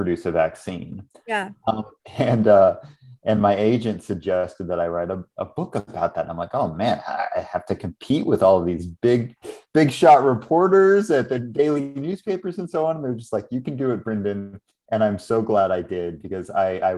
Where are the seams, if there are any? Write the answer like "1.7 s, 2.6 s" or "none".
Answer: none